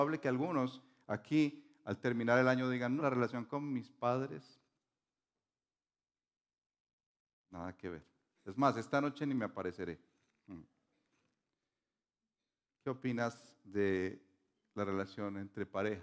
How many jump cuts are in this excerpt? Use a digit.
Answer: 1